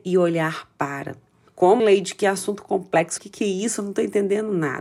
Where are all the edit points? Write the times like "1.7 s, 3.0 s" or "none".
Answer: 1.8 s, 3.2 s